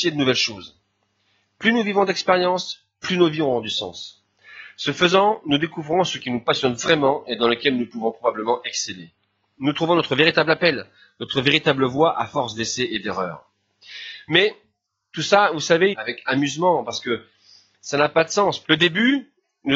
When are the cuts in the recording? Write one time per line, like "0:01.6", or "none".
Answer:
0:15.9
0:18.6

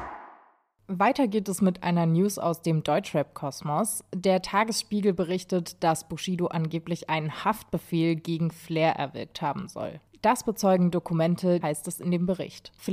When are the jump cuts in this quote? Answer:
0:11.6

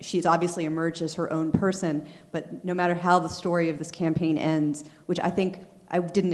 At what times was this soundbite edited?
0:05.0

